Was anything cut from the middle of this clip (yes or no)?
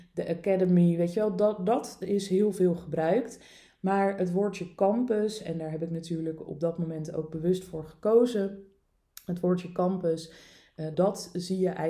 yes